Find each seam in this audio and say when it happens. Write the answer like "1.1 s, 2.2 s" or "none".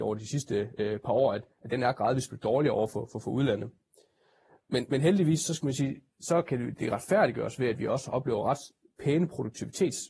none